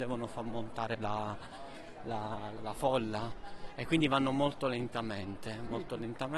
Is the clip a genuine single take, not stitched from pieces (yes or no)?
no